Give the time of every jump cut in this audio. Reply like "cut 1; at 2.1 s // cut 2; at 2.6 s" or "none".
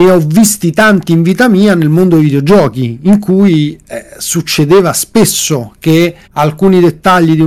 cut 1; at 6.2 s